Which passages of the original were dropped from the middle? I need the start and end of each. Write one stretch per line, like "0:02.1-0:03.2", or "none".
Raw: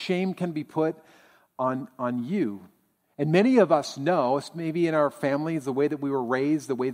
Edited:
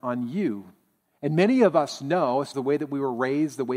0:04.5-0:05.6